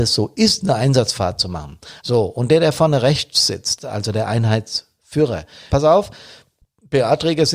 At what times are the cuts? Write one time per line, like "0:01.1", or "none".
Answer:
0:02.0
0:05.7